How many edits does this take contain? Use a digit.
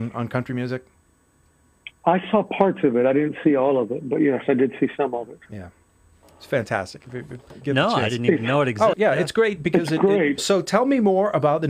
2